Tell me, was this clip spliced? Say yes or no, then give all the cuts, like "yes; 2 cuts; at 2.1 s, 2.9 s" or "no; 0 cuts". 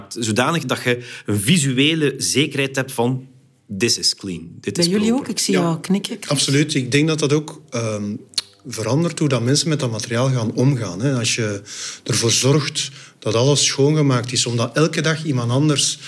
no; 0 cuts